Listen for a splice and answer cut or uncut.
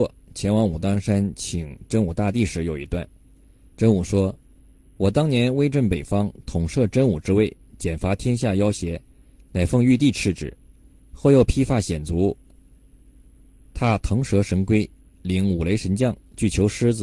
uncut